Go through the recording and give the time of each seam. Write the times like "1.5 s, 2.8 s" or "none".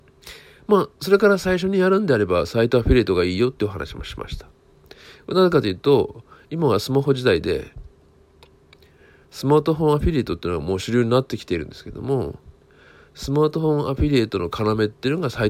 none

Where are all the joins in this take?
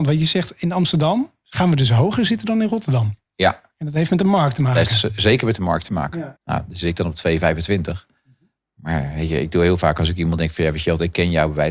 6.4 s

